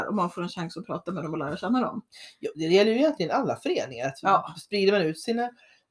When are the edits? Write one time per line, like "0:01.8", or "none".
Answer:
none